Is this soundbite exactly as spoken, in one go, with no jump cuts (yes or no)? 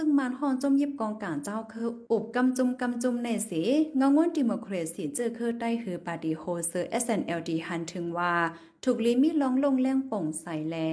yes